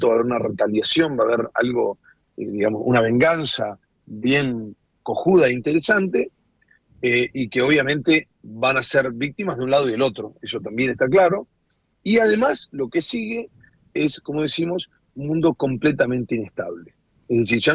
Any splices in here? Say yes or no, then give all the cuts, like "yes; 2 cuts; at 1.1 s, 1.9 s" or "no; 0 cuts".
no; 0 cuts